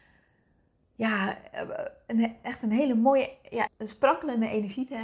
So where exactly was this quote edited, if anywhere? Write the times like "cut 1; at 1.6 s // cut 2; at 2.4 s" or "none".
cut 1; at 3.7 s